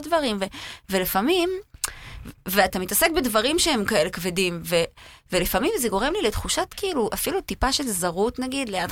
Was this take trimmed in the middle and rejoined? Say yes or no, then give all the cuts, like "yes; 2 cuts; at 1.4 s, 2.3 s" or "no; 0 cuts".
no; 0 cuts